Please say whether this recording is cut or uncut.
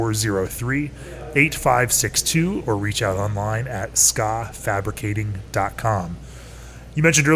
uncut